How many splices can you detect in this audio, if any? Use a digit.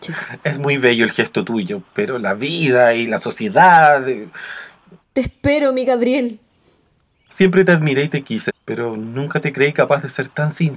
3